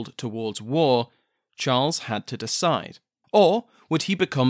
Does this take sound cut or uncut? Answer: cut